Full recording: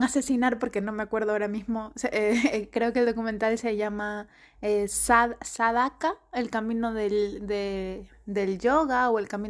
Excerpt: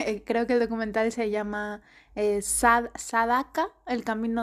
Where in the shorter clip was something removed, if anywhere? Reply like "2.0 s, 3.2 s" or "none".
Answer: none